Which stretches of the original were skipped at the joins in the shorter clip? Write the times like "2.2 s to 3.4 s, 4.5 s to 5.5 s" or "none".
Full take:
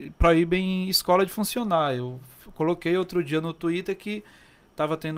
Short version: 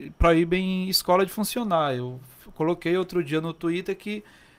none